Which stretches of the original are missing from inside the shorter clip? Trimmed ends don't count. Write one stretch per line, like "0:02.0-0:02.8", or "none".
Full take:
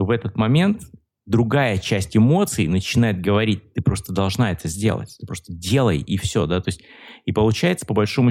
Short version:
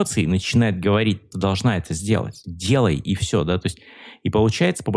0:03.7-0:04.1
0:05.2-0:05.5